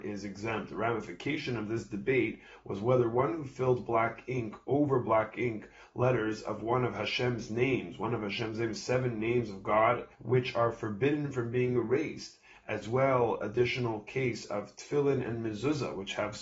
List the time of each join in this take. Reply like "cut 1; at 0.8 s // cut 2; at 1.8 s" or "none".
cut 1; at 10.1 s